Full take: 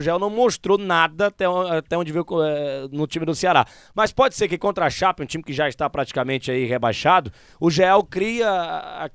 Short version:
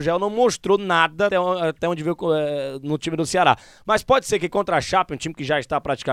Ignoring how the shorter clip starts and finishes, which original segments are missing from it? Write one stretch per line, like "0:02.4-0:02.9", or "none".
0:01.3-0:01.4